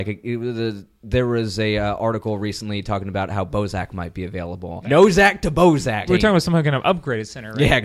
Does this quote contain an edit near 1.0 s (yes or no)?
no